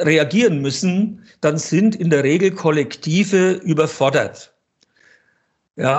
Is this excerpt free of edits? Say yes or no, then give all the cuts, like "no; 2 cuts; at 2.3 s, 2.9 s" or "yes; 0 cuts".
yes; 0 cuts